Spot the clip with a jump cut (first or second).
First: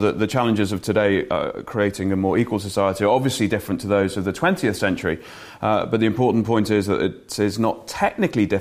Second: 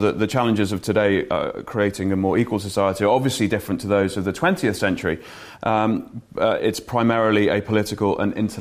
second